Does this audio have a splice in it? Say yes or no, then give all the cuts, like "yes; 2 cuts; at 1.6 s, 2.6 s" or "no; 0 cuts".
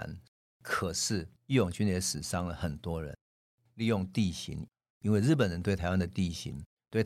yes; 2 cuts; at 1.4 s, 3.7 s